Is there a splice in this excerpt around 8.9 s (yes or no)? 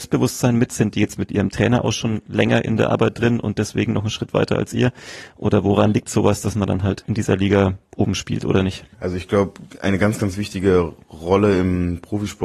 yes